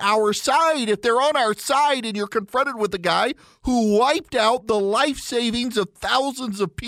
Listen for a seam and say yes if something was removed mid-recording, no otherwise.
no